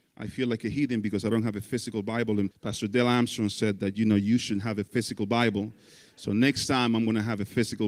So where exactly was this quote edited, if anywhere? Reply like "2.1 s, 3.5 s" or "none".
2.5 s